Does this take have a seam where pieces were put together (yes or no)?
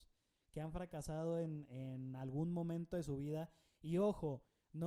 no